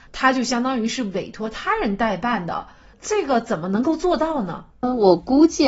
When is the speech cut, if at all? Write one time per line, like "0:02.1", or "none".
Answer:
0:04.7